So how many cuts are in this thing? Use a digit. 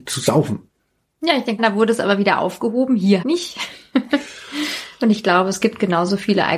2